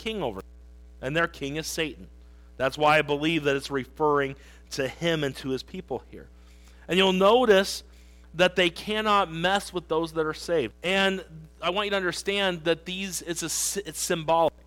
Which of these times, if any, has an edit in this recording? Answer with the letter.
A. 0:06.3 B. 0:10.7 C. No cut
B